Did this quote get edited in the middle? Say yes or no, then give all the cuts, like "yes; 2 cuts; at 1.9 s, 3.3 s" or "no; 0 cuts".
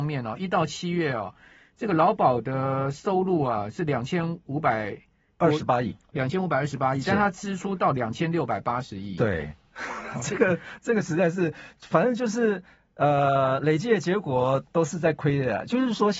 no; 0 cuts